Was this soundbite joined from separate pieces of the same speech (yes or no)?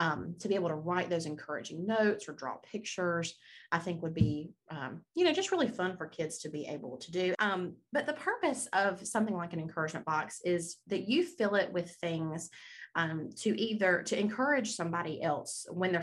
yes